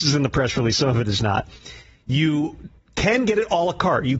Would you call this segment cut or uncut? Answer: uncut